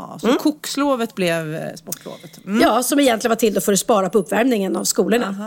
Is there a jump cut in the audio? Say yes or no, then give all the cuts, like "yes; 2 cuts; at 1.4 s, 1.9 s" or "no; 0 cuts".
no; 0 cuts